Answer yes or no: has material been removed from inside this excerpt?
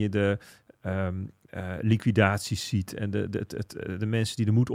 no